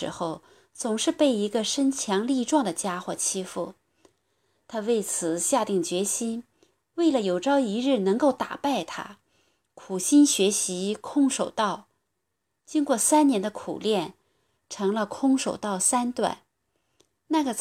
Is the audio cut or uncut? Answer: uncut